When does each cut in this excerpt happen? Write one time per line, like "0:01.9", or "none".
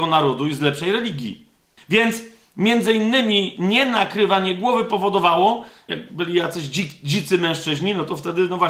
0:01.8
0:05.9